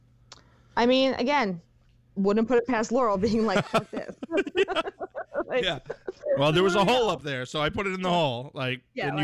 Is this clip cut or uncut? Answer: uncut